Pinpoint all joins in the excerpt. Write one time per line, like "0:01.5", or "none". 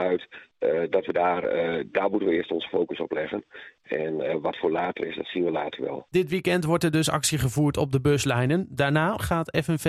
none